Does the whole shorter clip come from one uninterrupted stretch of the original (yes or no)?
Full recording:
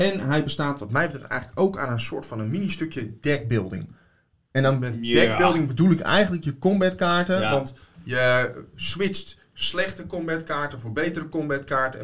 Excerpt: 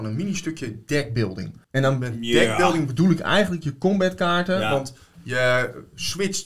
no